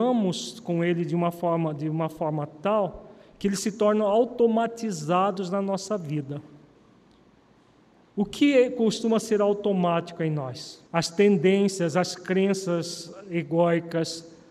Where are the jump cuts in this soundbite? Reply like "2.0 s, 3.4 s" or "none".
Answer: 10.9 s